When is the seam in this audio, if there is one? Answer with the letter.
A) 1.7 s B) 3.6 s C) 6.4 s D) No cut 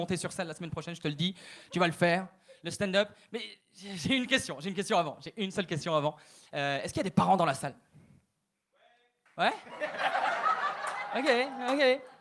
B